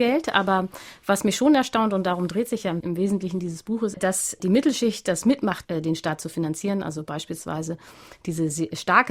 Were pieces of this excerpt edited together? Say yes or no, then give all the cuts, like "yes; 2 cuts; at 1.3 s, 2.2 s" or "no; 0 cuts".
yes; 2 cuts; at 3.9 s, 5.6 s